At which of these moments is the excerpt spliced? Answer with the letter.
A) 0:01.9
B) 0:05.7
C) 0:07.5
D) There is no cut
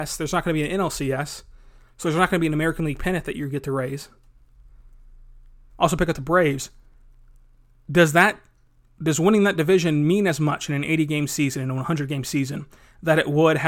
B